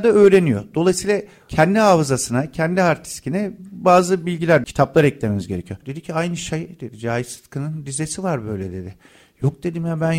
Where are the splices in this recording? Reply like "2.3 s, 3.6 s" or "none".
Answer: 4.6 s, 5.8 s